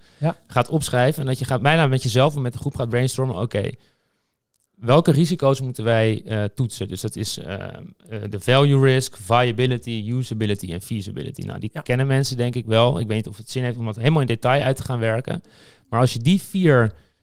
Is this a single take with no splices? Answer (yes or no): yes